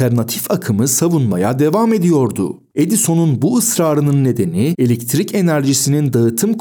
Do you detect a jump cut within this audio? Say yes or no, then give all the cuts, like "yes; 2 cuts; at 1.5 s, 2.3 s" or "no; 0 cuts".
no; 0 cuts